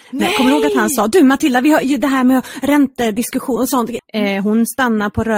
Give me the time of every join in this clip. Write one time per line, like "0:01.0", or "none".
0:04.0